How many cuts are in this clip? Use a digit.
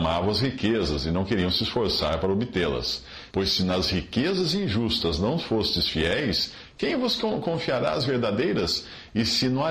1